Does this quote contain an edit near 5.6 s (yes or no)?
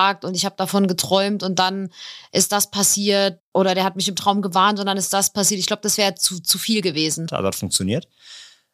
no